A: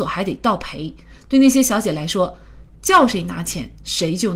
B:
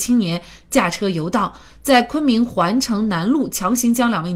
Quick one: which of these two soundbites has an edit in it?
A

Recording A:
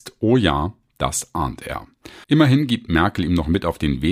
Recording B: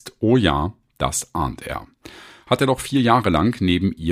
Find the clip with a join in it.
A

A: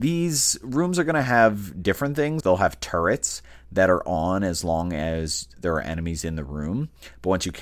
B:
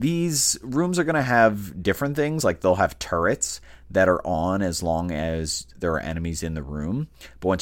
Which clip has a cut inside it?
A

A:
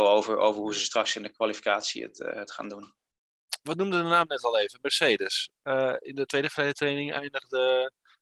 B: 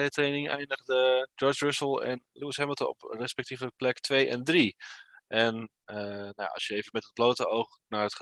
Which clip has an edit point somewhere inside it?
B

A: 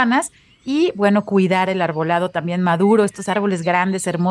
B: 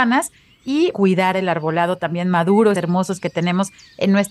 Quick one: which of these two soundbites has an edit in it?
B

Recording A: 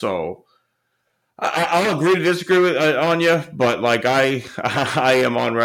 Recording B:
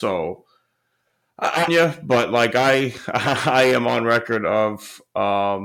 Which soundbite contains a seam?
B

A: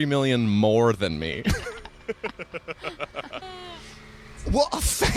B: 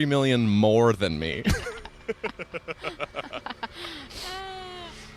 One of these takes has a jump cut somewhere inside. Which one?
A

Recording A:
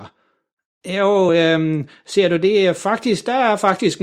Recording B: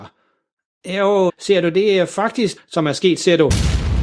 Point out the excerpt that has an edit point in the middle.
B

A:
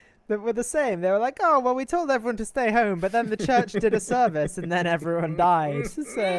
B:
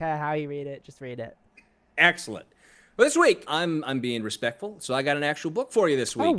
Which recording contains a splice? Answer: B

